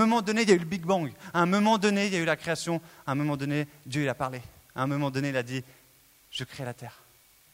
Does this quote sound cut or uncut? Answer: uncut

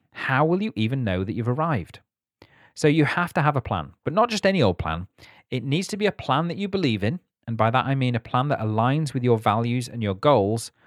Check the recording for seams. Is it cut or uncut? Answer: uncut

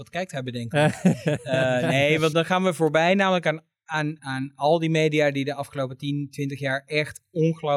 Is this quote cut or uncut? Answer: cut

